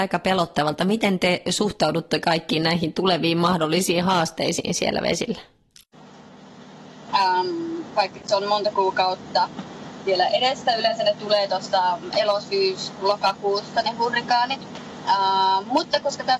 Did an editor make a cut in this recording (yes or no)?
yes